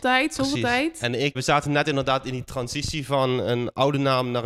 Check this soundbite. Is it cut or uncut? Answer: cut